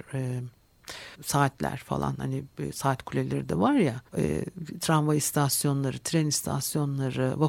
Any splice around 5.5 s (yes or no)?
no